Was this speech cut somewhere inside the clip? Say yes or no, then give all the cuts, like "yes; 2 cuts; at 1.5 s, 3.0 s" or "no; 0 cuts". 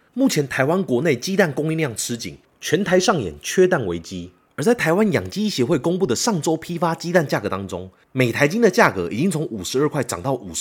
no; 0 cuts